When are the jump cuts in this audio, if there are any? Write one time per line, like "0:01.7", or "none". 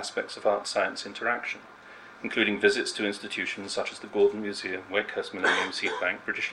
0:04.9